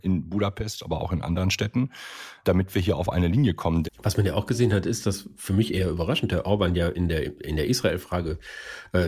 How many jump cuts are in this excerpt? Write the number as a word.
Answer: one